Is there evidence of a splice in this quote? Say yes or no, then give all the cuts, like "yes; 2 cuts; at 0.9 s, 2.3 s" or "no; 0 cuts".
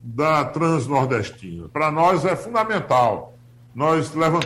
no; 0 cuts